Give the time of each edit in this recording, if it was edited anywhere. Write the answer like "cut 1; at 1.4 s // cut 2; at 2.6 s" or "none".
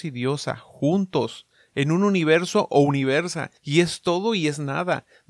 none